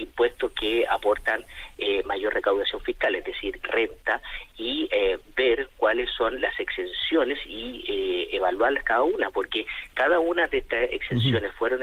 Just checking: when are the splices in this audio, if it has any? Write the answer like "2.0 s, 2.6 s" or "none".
3.6 s